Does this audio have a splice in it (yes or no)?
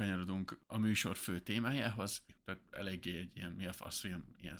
yes